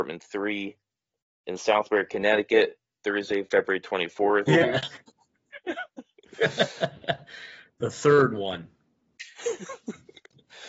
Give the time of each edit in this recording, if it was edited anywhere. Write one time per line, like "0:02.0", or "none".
0:04.5